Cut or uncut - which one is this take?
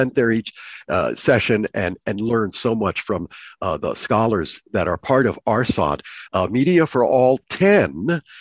cut